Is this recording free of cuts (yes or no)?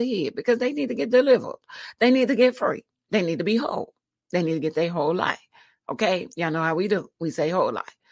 yes